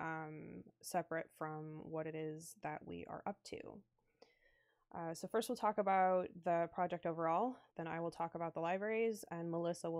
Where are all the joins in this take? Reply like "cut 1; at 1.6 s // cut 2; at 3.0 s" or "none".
cut 1; at 7.7 s